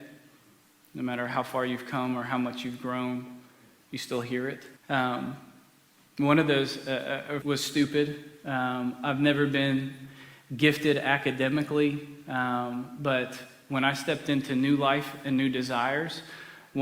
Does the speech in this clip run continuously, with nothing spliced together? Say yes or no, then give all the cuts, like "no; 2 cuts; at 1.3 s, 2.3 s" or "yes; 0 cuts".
no; 2 cuts; at 4.8 s, 7.4 s